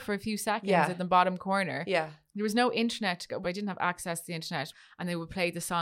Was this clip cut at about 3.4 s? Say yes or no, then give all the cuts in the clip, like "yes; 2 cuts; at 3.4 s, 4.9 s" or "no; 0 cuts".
yes; 2 cuts; at 3.4 s, 4.7 s